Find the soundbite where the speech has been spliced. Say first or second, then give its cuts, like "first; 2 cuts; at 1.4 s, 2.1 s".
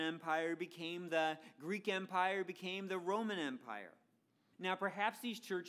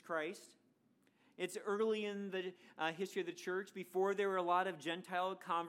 first; 1 cut; at 4.5 s